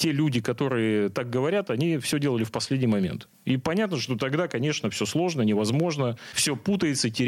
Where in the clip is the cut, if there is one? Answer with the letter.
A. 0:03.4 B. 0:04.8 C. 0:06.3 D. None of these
C